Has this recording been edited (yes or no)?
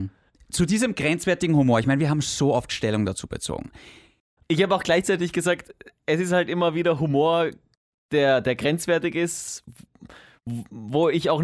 yes